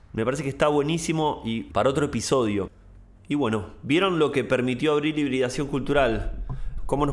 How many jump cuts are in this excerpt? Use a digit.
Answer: 1